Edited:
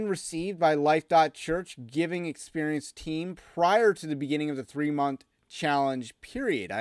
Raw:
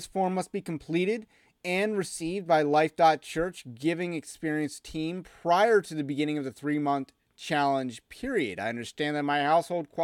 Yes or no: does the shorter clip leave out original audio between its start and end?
no